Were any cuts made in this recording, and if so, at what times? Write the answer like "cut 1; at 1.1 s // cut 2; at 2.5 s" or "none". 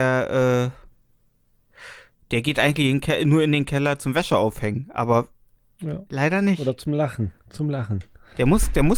none